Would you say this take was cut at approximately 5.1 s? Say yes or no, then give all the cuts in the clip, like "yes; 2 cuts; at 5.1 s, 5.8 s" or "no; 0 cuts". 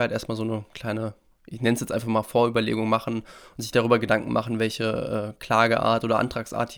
no; 1 cut; at 1.3 s